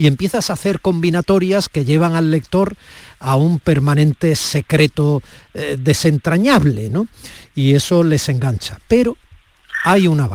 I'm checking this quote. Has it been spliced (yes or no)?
no